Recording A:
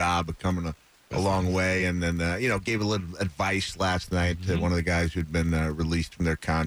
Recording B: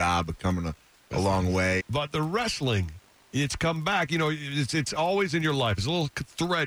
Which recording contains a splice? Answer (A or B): B